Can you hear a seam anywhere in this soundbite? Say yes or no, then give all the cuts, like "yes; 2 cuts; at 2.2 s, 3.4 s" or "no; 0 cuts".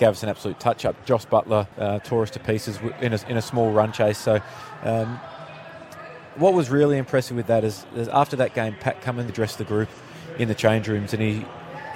yes; 2 cuts; at 1.7 s, 9.3 s